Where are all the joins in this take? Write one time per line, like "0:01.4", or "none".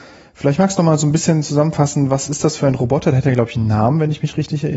none